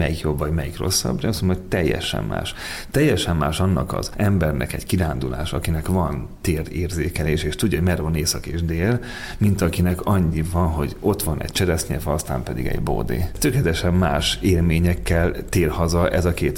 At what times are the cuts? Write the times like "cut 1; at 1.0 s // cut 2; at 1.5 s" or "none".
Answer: none